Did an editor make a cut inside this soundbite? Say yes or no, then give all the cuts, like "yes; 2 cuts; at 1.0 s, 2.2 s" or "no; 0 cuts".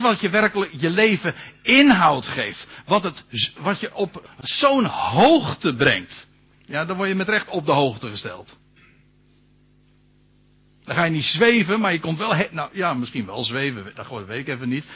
no; 0 cuts